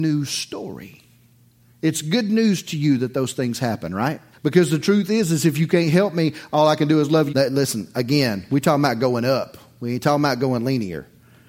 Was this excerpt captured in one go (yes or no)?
no